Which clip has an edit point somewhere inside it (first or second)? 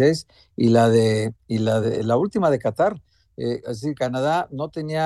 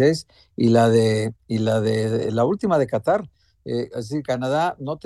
first